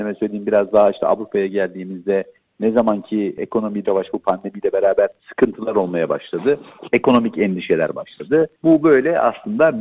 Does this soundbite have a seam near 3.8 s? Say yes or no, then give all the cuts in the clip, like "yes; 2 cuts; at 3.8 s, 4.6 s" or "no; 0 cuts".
yes; 1 cut; at 3.8 s